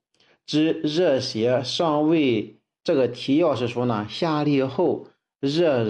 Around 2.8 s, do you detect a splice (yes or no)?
yes